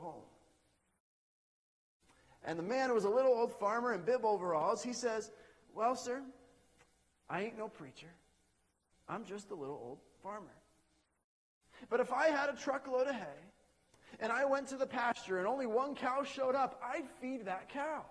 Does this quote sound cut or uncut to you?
uncut